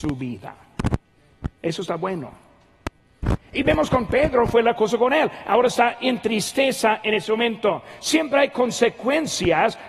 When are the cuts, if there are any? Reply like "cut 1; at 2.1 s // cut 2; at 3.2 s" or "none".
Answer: cut 1; at 3.4 s